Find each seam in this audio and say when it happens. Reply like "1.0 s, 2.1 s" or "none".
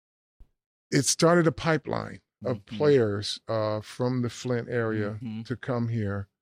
none